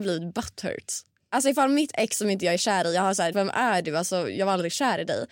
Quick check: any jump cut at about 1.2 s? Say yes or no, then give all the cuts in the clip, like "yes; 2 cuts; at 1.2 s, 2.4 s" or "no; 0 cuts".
no; 1 cut; at 3.3 s